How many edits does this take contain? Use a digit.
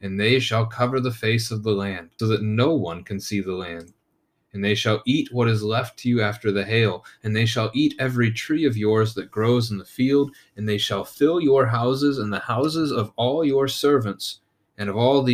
1